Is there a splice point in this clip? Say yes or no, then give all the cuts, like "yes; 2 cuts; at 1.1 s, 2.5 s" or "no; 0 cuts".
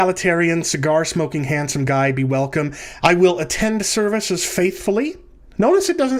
yes; 1 cut; at 3.0 s